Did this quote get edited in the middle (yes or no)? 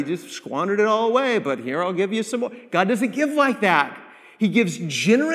no